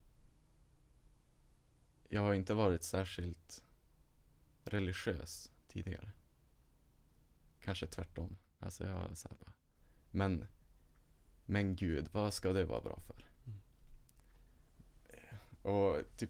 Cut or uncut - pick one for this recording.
uncut